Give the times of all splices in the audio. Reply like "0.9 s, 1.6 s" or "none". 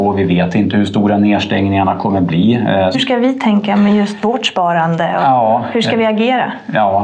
2.9 s